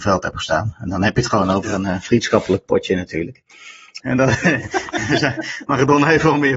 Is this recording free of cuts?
no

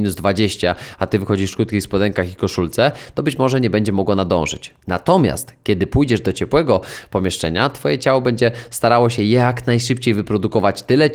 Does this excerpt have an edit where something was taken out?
no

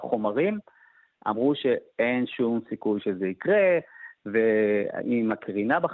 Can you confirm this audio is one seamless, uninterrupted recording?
yes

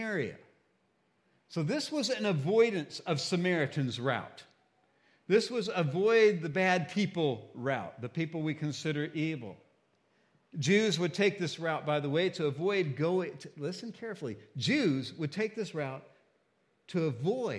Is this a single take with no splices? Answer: no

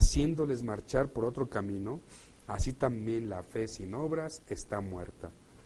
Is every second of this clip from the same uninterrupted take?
no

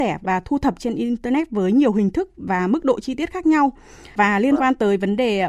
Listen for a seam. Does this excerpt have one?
yes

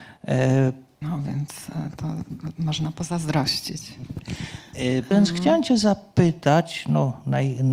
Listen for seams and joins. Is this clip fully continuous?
no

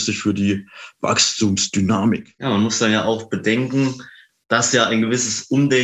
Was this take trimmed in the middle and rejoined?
no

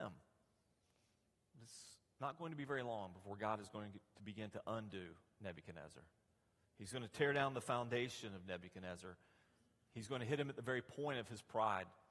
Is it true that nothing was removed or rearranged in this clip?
yes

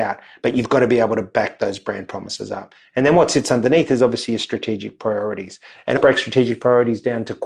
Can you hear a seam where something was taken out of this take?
yes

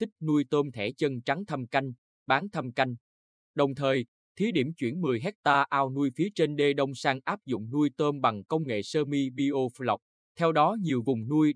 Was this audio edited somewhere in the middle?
yes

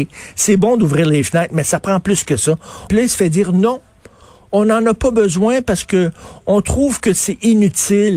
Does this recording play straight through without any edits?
no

